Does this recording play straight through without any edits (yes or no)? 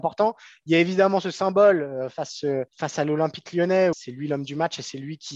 no